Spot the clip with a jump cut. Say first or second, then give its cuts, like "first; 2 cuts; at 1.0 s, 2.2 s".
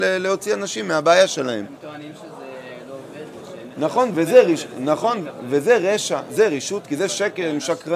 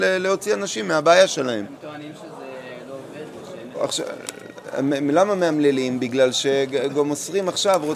second; 1 cut; at 3.7 s